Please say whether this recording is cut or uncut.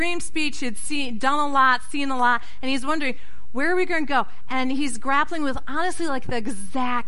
uncut